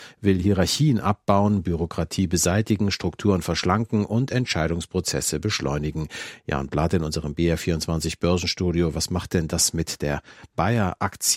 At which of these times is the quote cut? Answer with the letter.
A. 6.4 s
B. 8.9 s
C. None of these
C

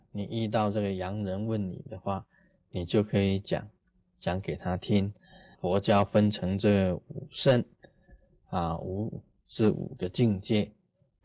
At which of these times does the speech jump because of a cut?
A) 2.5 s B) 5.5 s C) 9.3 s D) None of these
B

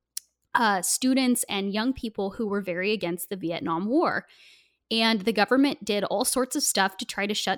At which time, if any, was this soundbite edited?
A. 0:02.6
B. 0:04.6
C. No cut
C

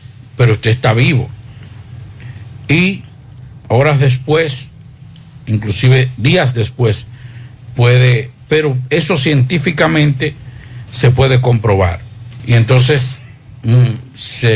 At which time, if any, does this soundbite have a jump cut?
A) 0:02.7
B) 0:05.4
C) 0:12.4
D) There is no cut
C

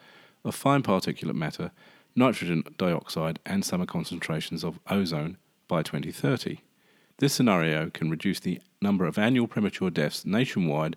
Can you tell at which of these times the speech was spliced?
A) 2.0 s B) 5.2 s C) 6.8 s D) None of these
D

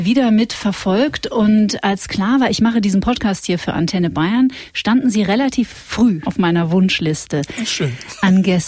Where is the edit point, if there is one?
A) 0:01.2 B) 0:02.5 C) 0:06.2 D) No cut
C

